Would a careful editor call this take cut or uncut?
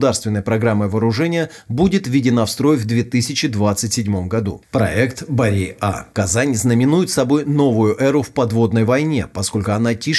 cut